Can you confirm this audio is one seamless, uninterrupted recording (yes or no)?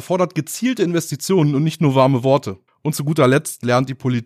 no